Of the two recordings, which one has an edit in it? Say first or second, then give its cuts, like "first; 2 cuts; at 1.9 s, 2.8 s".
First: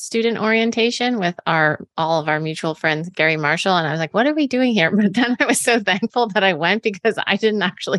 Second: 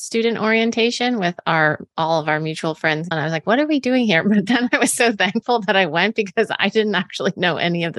second; 1 cut; at 3.1 s